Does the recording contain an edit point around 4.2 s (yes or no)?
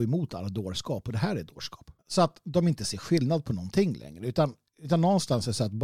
no